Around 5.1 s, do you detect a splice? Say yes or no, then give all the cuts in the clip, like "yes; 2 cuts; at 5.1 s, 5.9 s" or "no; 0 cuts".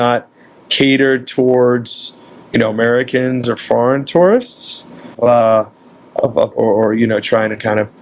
yes; 2 cuts; at 5.1 s, 6.5 s